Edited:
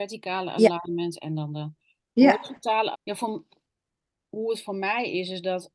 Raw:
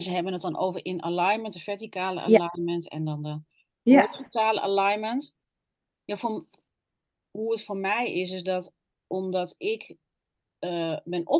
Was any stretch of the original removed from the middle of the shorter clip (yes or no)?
yes